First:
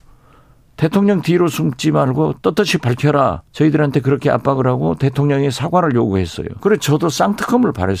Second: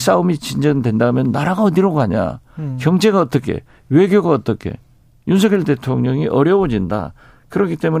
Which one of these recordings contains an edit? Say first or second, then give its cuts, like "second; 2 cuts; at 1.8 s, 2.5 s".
first; 2 cuts; at 3.5 s, 6.6 s